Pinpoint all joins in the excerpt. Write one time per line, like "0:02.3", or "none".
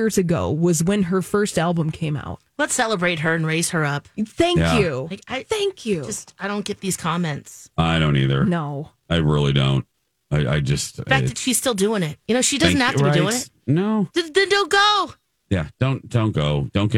none